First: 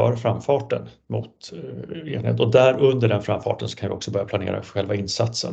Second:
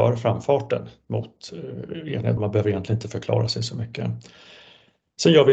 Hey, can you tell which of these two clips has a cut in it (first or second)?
second